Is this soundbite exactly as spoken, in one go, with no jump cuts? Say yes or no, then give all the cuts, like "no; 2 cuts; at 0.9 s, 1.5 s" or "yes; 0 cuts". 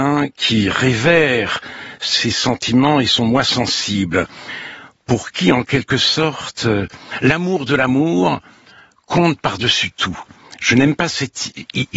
yes; 0 cuts